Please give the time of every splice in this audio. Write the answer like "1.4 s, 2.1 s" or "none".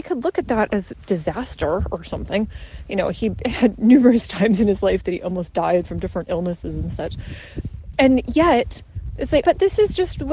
9.4 s